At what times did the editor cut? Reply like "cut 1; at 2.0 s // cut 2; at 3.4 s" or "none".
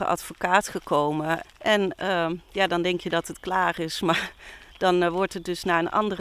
cut 1; at 1.4 s